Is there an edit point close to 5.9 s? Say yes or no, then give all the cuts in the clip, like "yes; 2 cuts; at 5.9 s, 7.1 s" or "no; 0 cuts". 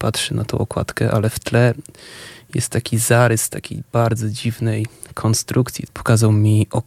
yes; 1 cut; at 5.9 s